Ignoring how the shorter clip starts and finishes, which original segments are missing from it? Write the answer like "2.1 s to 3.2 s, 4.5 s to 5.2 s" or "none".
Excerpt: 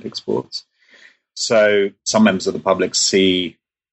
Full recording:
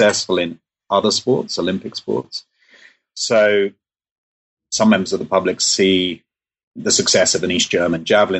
3.8 s to 4.6 s